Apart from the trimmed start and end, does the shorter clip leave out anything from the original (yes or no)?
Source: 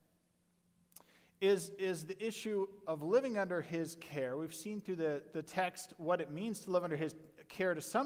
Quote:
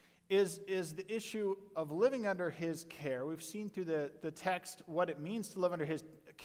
no